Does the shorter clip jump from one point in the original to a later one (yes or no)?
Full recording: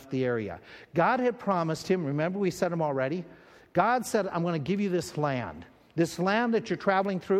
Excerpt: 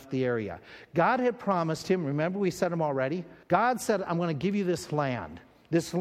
yes